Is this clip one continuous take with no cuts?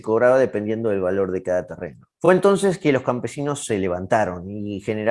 yes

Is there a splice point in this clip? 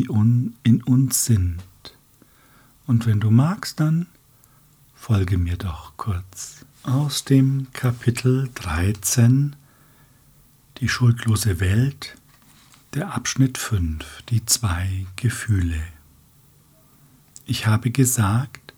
yes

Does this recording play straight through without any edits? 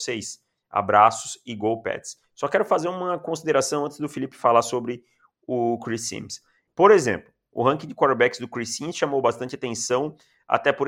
no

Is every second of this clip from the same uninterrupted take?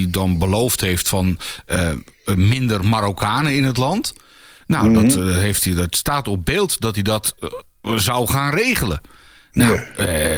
yes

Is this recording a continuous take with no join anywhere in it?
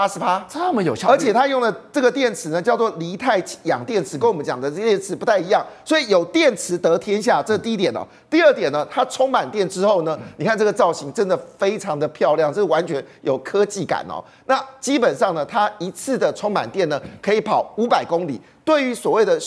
yes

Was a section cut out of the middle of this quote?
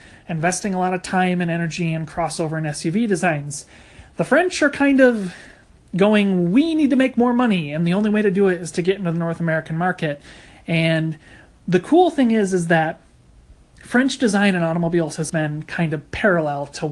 yes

